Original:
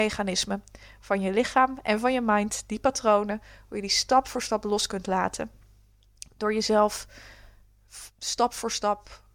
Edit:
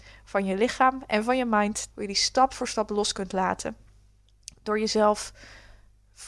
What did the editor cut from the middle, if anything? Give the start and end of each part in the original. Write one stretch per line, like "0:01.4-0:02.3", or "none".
0:02.7-0:03.6